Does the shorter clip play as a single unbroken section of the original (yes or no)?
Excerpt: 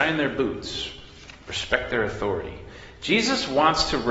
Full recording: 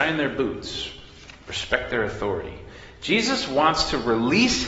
yes